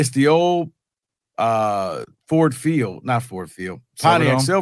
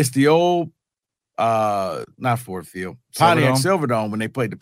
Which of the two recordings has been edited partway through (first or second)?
second